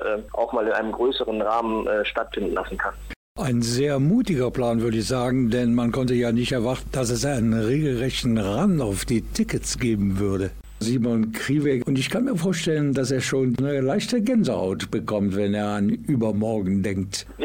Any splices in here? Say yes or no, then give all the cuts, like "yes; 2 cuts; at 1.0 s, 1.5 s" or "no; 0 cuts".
yes; 1 cut; at 10.8 s